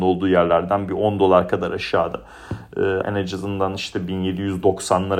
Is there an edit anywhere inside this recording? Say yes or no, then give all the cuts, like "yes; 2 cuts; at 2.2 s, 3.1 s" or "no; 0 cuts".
yes; 1 cut; at 3.0 s